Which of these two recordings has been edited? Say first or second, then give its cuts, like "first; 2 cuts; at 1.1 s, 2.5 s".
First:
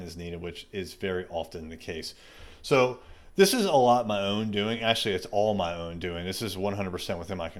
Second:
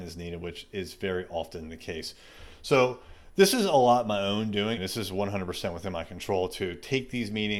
second; 1 cut; at 4.8 s